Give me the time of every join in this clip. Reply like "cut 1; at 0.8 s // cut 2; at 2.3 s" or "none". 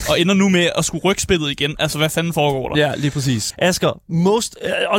cut 1; at 3.5 s